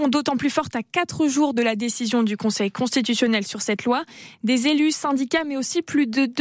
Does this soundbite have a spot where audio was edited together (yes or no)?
no